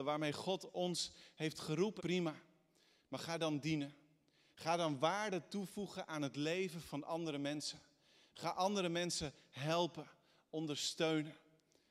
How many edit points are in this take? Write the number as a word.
one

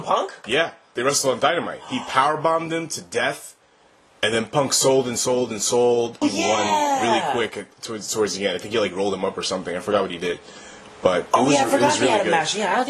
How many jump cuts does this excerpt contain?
one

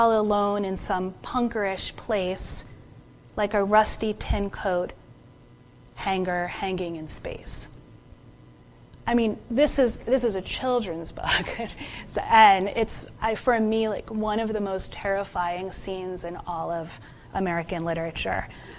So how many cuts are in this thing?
zero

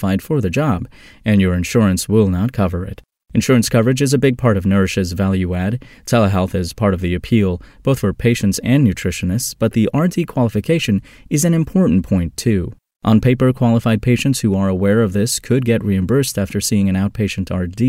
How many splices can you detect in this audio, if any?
two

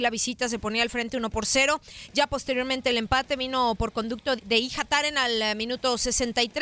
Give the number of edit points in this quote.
one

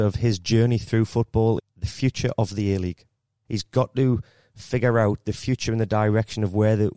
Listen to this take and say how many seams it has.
two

